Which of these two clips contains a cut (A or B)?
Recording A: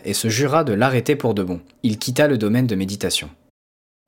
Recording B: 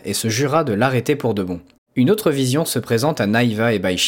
B